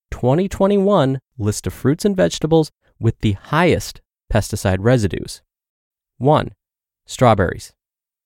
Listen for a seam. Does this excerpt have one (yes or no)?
no